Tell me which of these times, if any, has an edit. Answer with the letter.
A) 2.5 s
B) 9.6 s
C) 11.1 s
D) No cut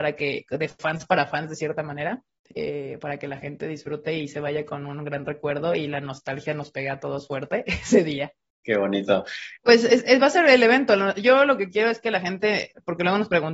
B